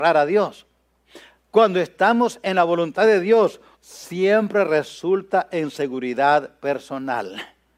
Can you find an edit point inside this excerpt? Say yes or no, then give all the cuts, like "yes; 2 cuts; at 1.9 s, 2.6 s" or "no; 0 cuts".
yes; 1 cut; at 3.7 s